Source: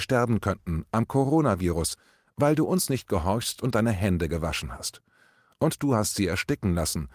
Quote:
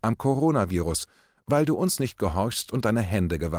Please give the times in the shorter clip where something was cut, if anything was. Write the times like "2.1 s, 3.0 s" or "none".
none